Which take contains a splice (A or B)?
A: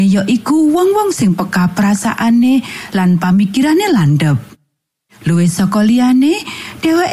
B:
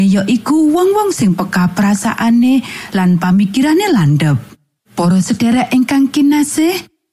B